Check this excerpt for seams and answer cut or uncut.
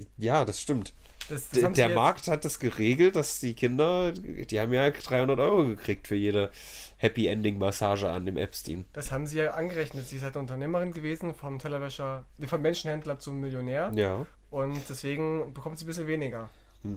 uncut